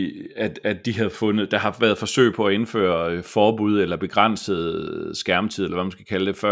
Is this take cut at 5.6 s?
no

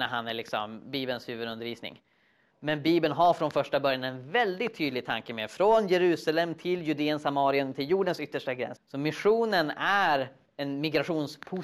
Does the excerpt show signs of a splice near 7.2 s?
no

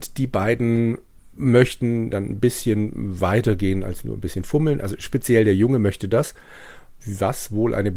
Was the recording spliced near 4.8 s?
no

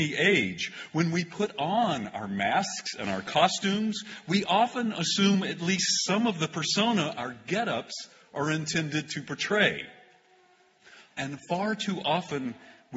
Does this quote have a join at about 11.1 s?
yes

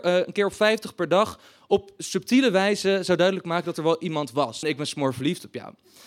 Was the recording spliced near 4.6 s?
yes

